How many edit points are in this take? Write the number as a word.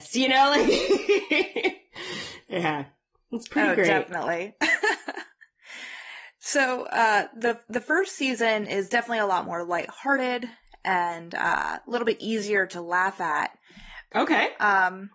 one